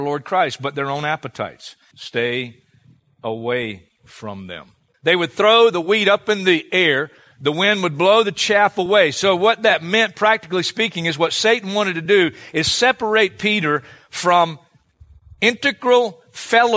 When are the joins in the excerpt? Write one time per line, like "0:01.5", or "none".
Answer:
0:01.9
0:04.9